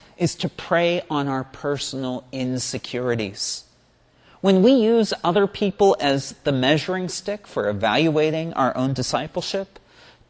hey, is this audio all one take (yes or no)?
yes